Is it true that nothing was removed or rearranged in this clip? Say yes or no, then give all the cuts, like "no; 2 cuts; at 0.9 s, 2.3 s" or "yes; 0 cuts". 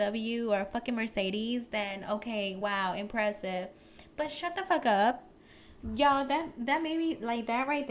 yes; 0 cuts